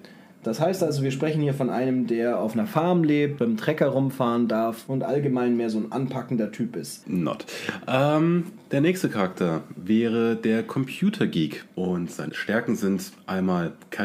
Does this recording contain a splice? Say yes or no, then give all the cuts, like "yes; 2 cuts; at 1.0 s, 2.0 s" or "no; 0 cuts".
yes; 3 cuts; at 3.4 s, 7.0 s, 11.7 s